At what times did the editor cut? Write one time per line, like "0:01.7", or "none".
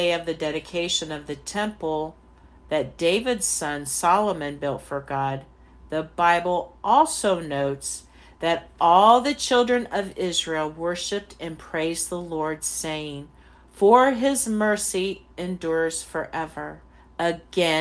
0:13.7